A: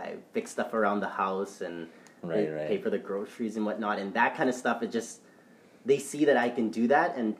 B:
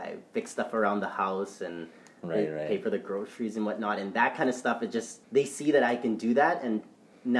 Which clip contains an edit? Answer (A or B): B